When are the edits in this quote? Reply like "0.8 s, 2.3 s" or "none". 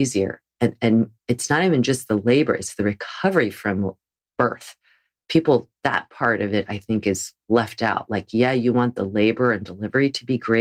none